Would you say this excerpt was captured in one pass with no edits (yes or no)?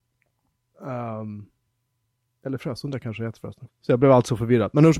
no